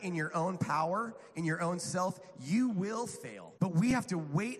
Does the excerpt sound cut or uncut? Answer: cut